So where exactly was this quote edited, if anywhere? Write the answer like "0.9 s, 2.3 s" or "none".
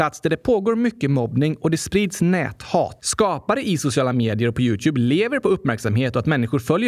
3.0 s